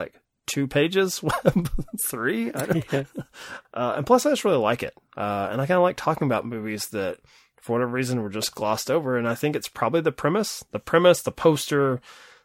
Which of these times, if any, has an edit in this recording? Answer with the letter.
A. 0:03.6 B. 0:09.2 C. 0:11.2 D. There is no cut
A